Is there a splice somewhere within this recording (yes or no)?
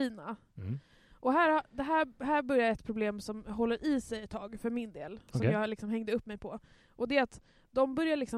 no